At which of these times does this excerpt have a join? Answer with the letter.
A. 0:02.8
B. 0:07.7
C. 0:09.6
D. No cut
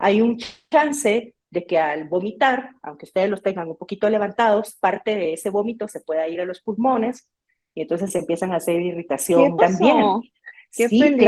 C